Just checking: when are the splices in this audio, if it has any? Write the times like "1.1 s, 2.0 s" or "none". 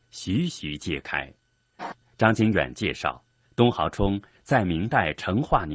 1.8 s